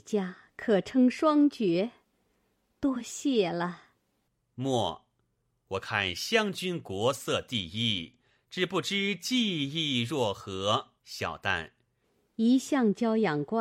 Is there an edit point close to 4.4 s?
yes; 2 cuts; at 4.4 s, 11.0 s

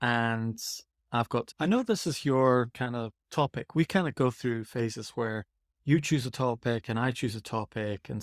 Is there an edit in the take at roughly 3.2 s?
yes; 2 cuts; at 1.5 s, 3.2 s

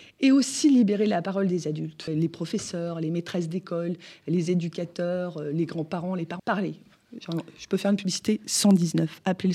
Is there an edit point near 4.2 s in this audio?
no; 2 cuts; at 2.1 s, 6.4 s

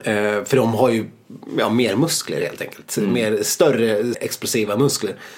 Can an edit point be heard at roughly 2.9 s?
no; 1 cut; at 4.1 s

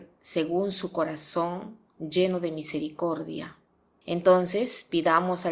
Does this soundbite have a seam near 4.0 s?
yes; 1 cut; at 4.0 s

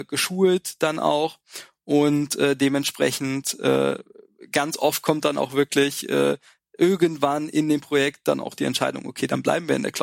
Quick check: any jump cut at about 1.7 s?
no; 0 cuts

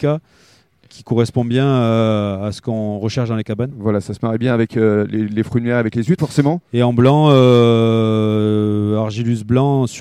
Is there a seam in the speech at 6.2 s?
yes; 1 cut; at 6.2 s

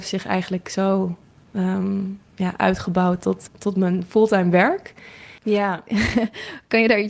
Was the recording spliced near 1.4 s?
no; 2 cuts; at 3.5 s, 5.4 s

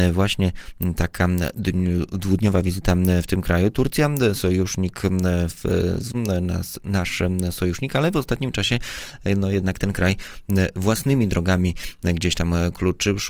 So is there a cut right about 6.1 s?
yes; 1 cut; at 6.1 s

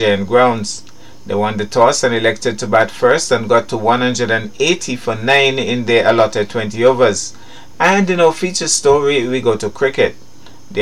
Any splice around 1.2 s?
no; 1 cut; at 7.7 s

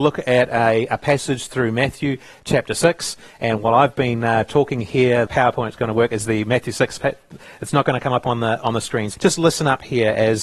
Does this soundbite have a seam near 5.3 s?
yes; 2 cuts; at 5.3 s, 9.1 s

